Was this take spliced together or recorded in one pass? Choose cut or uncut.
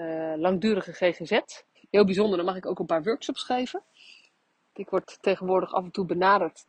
cut